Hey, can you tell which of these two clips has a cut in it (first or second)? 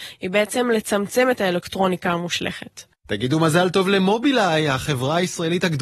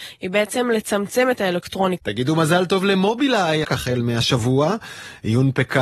second